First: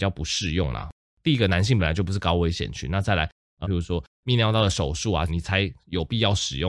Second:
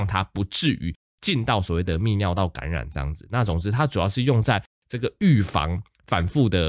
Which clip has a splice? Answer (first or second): first